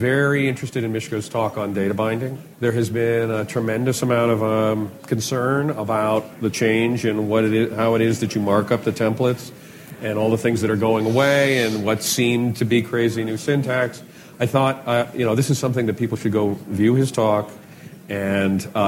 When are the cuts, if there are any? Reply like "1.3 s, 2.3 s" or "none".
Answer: 2.5 s